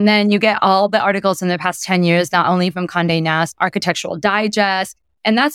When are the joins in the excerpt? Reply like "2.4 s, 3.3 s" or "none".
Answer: 3.6 s